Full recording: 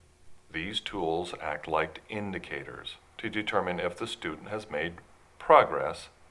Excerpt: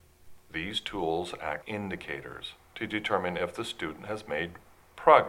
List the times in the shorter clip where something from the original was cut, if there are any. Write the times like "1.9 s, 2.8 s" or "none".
1.6 s